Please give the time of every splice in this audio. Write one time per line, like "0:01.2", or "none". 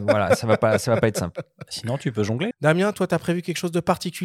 0:02.5